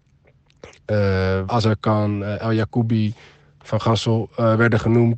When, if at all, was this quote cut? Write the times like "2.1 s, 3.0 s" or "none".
1.5 s